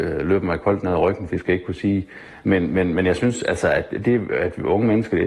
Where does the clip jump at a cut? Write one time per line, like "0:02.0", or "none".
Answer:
0:01.3